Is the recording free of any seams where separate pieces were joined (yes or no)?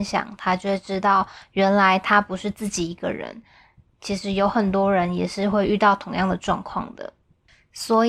yes